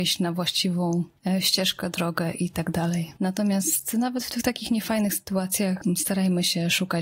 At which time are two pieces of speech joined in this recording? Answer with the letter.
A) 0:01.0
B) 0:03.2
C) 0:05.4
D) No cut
B